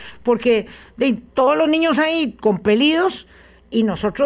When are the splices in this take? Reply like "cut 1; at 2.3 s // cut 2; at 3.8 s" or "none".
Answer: cut 1; at 1.3 s